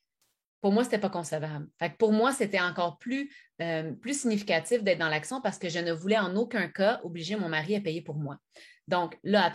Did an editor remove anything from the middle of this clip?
no; 0 cuts

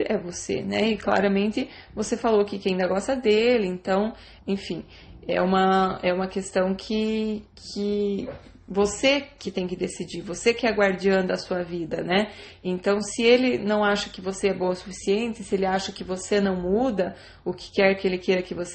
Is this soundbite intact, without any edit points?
no; 1 cut; at 4.4 s

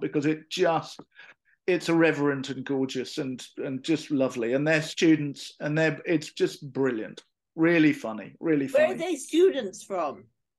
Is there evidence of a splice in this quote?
no; 0 cuts

